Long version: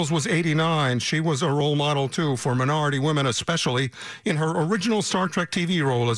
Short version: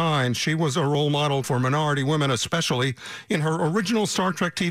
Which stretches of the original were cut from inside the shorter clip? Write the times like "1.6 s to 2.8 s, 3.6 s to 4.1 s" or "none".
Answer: 2.1 s to 2.4 s